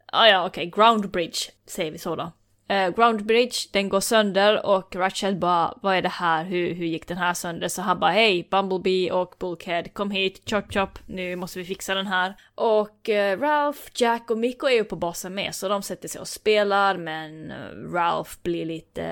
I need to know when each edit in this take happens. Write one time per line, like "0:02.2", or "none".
0:01.6